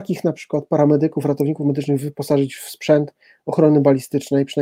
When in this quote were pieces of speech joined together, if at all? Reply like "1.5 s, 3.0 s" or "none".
none